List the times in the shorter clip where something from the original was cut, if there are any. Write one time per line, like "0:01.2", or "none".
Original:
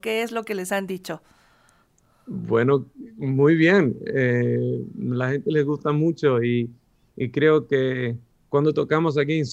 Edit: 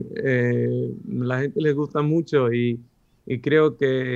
none